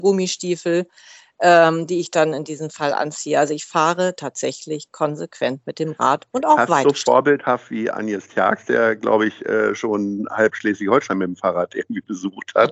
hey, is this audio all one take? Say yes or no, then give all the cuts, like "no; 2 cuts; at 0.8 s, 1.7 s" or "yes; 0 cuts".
yes; 0 cuts